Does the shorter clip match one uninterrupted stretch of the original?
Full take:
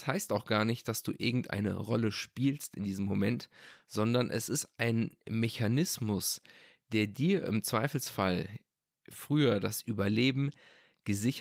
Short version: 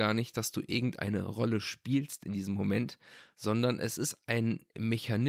yes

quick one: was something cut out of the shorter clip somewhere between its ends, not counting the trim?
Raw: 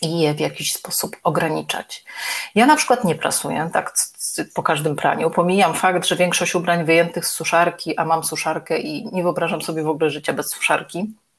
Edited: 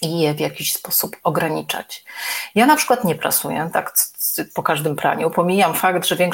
no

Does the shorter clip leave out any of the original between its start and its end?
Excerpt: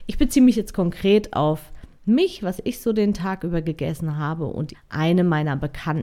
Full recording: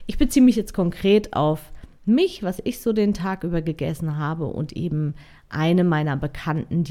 yes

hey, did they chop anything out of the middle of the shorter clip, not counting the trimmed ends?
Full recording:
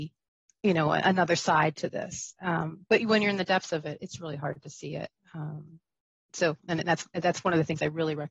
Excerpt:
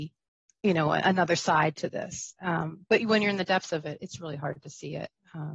no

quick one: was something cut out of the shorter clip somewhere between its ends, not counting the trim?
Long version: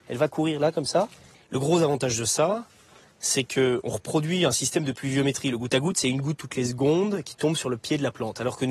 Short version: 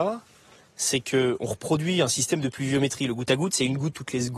no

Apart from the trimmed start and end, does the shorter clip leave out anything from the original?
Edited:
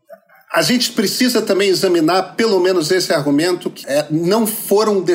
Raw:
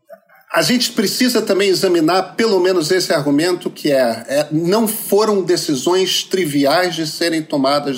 yes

